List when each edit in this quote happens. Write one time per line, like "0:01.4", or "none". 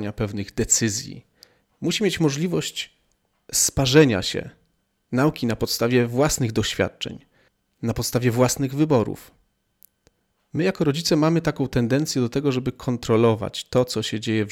none